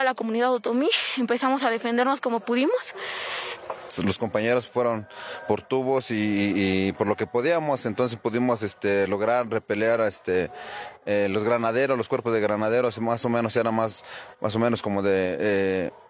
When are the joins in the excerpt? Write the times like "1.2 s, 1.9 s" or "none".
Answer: none